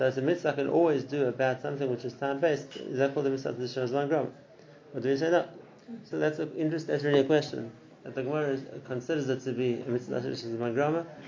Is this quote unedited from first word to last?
no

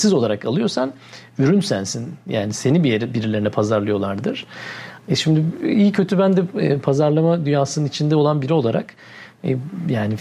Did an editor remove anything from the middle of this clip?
no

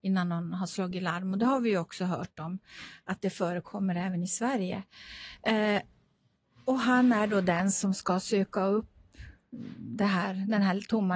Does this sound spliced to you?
no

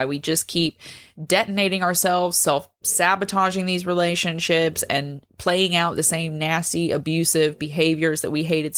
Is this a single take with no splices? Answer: yes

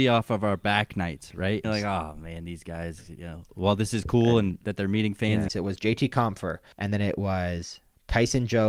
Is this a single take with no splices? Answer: no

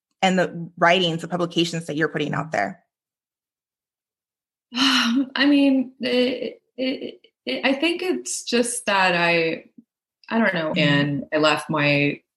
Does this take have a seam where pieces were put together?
yes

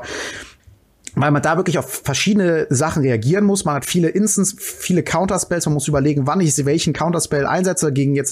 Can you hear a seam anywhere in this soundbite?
no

